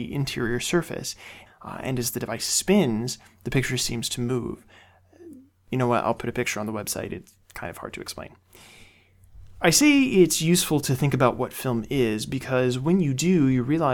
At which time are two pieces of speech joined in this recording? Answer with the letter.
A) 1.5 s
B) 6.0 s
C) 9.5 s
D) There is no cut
A